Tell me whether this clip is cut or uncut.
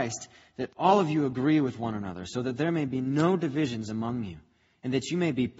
uncut